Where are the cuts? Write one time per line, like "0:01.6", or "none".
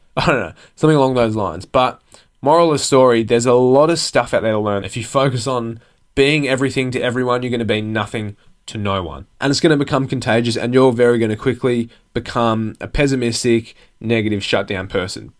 0:04.8
0:09.3

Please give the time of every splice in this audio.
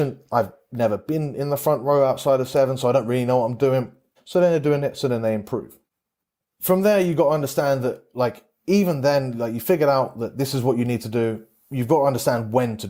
0:04.2

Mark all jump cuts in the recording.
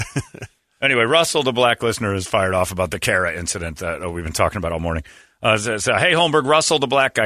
none

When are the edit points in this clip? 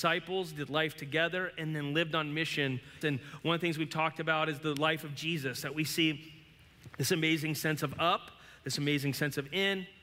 0:03.0

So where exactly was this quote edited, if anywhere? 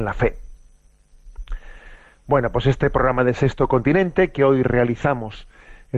none

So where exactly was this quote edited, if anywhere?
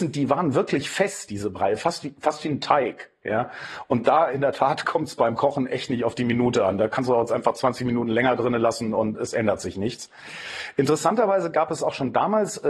none

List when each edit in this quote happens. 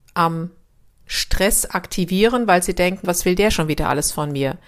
0:03.0

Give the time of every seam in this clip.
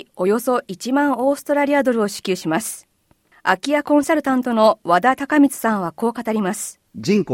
none

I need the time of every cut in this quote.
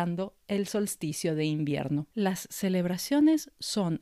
0:02.1

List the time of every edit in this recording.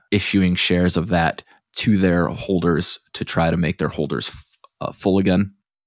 none

